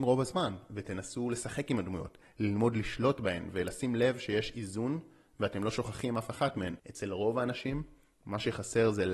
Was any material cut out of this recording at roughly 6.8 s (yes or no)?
no